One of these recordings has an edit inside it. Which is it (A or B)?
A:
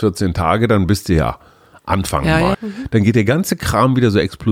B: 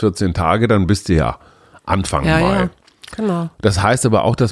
A